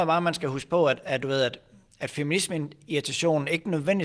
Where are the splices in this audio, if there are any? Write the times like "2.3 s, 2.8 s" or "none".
none